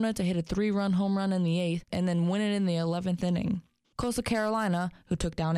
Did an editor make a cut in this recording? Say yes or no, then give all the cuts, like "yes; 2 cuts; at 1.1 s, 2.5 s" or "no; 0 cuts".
yes; 2 cuts; at 1.9 s, 3.8 s